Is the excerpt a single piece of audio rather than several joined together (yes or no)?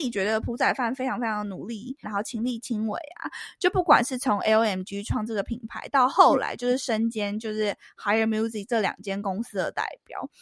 no